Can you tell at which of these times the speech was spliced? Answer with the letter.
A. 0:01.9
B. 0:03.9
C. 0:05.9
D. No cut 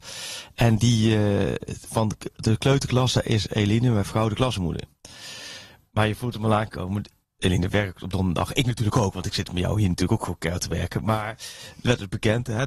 A